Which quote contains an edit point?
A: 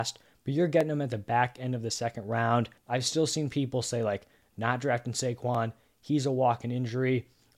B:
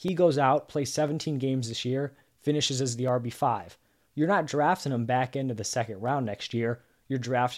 A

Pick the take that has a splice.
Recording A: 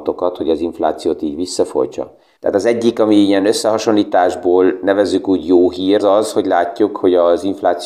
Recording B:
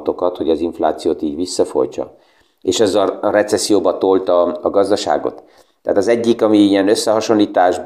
A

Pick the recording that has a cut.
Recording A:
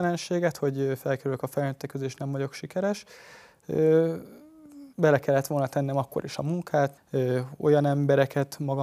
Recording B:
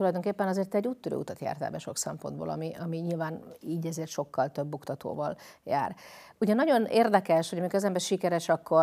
A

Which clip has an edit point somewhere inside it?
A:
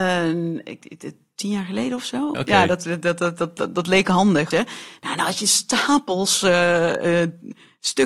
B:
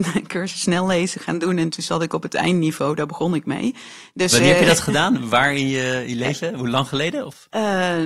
A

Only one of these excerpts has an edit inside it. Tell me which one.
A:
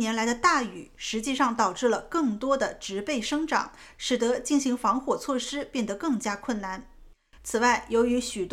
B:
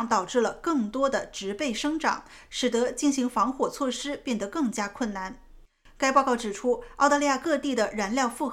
A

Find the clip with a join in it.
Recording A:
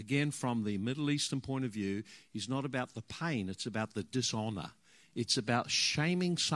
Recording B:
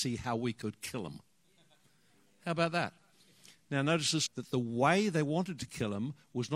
B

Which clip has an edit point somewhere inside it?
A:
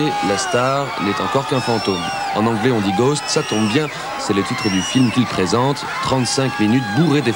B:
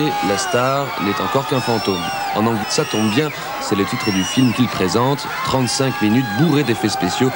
B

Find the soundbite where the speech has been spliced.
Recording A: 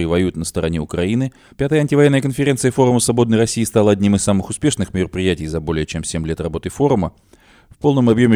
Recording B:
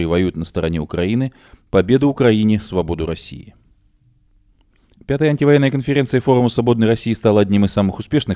A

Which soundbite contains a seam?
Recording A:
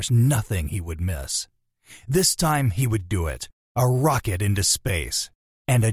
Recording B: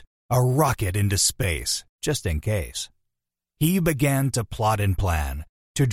B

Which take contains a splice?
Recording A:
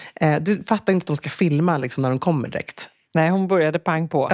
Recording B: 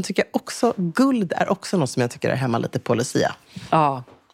A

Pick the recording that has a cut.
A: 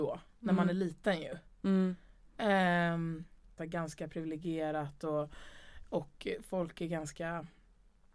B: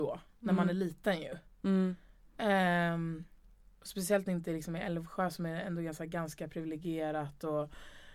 A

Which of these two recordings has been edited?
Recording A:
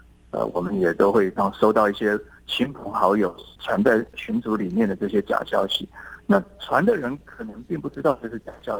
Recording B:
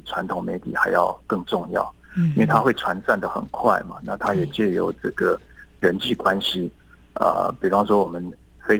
A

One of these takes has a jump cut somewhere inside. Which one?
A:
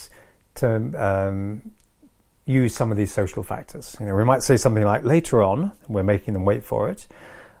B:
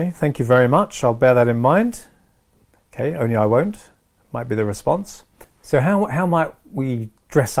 A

